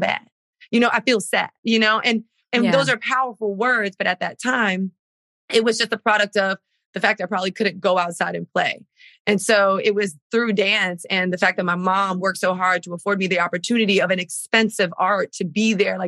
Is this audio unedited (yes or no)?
yes